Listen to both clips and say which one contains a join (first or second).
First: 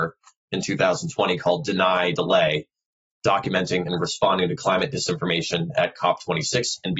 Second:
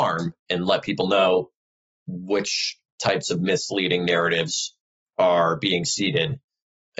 first